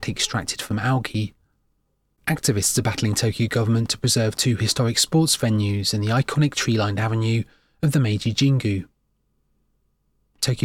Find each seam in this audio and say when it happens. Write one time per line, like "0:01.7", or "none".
0:02.2